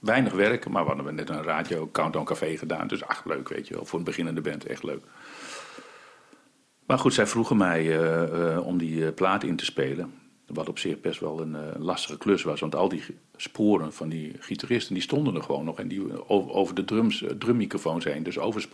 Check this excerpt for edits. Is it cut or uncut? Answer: uncut